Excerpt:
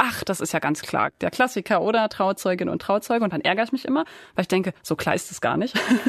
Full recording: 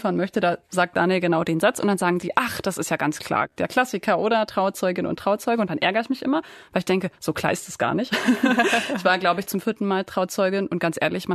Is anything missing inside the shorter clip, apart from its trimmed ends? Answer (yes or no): no